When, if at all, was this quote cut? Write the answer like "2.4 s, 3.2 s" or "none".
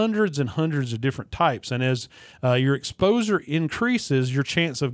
none